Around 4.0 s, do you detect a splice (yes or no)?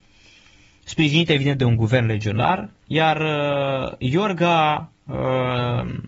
no